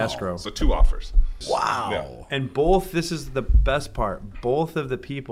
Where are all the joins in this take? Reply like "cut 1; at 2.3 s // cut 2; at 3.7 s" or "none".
cut 1; at 1.4 s